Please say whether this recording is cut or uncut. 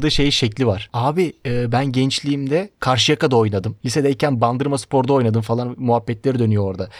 uncut